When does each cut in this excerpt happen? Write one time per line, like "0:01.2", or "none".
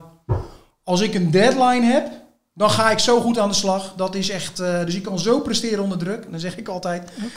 none